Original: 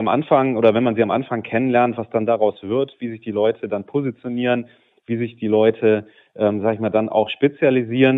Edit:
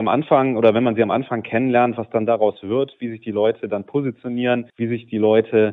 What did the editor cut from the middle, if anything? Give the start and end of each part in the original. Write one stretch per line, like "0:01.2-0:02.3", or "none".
0:04.7-0:05.0

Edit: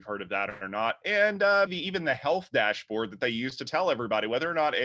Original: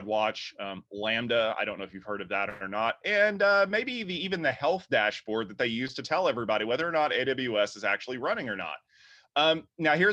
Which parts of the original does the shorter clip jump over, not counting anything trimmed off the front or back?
0:03.7-0:04.0

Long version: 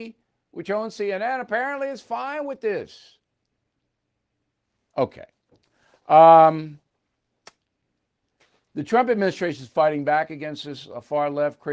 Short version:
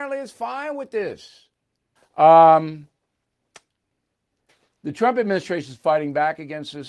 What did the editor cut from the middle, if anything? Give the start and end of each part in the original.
0:03.7-0:05.9

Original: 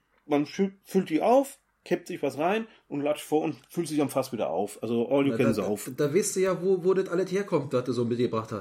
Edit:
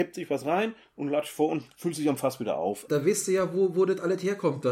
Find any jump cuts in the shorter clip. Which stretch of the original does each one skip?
0:04.8-0:06.0

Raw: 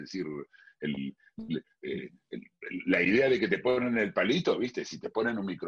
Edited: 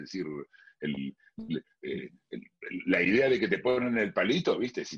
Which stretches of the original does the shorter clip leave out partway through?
none

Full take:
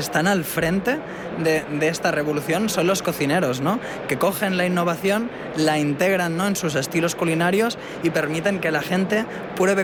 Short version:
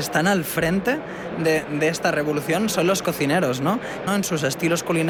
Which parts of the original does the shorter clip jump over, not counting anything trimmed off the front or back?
0:04.1-0:06.4

